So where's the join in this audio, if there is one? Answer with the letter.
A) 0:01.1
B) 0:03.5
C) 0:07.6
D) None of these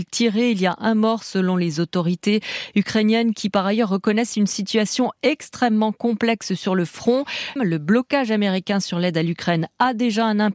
C